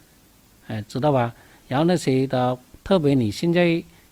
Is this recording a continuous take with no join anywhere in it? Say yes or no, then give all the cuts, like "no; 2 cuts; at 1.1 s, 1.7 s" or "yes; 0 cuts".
no; 1 cut; at 2.7 s